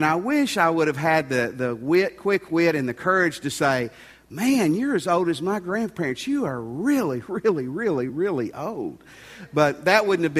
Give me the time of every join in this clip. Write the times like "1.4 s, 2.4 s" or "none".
8.1 s